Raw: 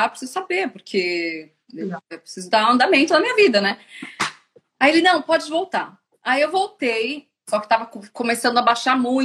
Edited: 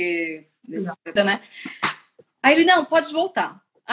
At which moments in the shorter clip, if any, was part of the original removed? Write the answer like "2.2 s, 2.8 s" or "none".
1.2 s

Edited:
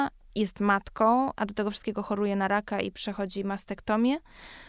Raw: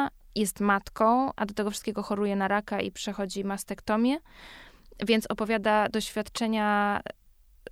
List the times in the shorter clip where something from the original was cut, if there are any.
none

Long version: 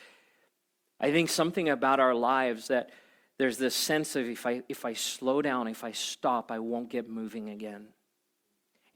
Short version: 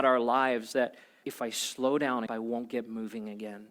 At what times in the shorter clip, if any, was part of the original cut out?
1.2 s, 2.3 s

